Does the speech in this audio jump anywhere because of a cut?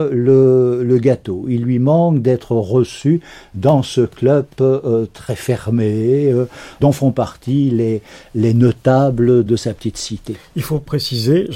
no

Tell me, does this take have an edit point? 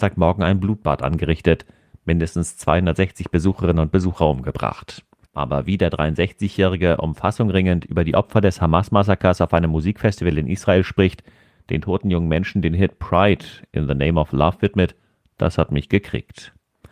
yes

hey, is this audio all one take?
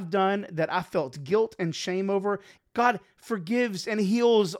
no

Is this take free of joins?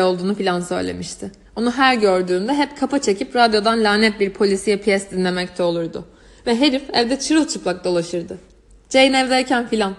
yes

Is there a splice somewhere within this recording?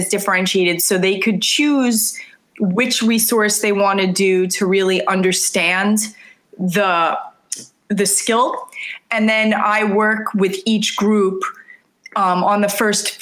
no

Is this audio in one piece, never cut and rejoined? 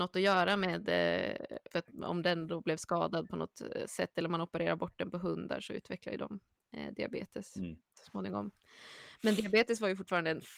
no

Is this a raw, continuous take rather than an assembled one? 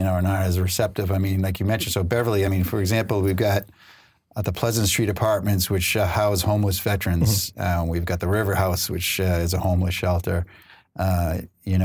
yes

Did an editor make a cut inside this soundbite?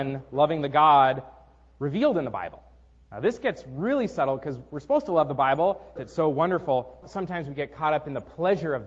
yes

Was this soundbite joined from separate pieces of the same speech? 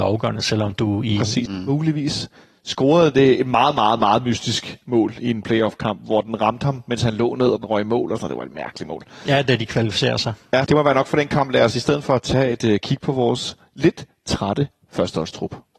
yes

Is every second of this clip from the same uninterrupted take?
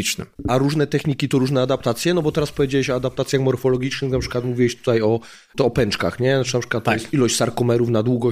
yes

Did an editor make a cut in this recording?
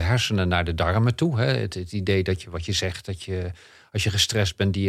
no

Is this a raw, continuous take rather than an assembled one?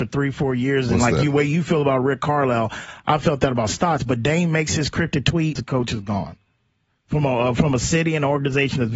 no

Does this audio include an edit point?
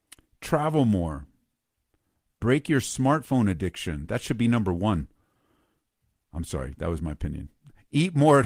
no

